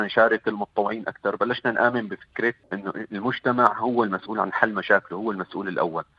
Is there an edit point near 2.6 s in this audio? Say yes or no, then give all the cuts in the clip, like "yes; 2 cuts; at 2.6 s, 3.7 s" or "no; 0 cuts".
yes; 1 cut; at 2.6 s